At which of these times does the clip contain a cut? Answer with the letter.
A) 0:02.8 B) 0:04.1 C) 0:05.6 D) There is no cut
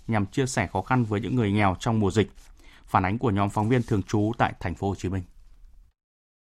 D